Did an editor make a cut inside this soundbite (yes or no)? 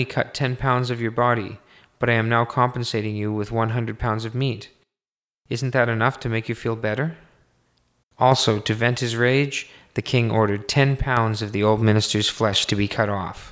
yes